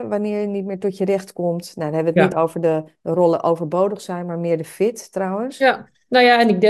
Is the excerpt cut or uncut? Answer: uncut